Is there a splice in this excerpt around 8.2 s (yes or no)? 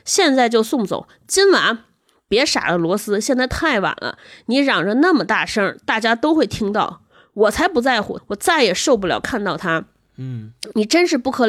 yes